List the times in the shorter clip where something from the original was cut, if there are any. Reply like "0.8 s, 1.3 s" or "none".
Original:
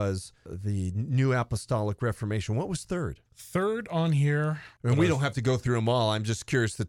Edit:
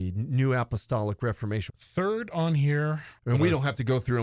1.7 s